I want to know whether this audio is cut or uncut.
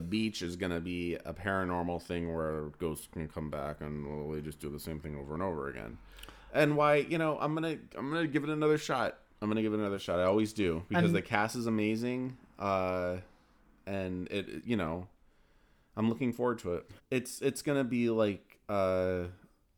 cut